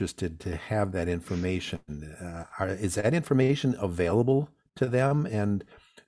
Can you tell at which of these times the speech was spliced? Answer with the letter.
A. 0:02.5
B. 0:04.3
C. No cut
C